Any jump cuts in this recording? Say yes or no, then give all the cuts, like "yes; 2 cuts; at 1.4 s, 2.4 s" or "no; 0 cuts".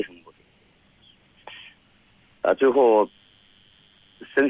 yes; 1 cut; at 2.4 s